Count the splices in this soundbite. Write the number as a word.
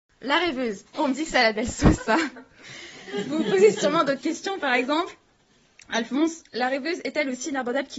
one